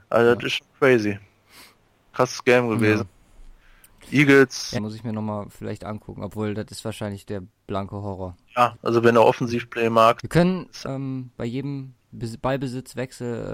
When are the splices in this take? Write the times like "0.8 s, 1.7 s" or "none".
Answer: 4.8 s, 8.7 s, 10.8 s

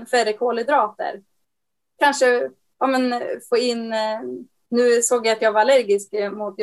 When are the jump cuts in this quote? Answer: none

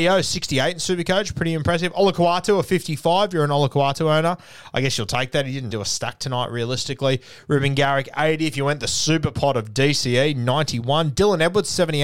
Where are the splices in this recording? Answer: 5.7 s

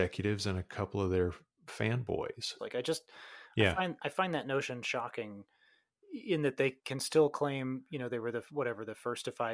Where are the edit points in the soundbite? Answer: 2.6 s

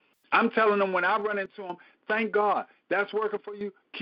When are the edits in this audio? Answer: none

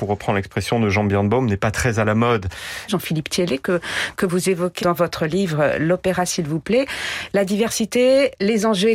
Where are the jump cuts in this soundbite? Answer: 2.9 s, 4.8 s

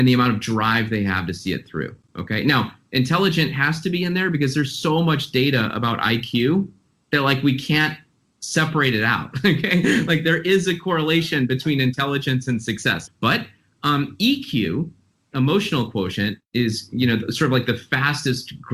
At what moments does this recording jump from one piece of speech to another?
13.1 s

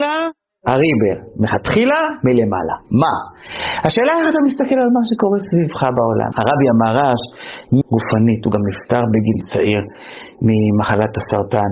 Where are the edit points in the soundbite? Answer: 6.3 s, 7.8 s

